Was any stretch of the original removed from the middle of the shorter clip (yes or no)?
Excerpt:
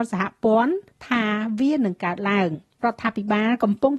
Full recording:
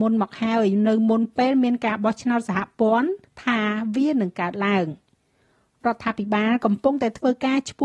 yes